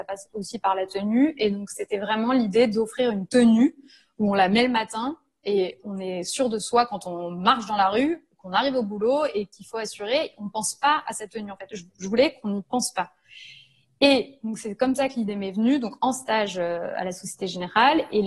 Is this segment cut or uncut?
uncut